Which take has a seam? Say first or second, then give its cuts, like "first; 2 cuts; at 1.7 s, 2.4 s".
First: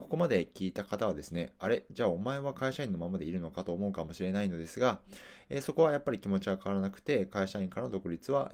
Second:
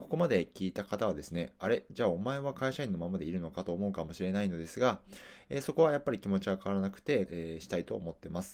second; 1 cut; at 7.3 s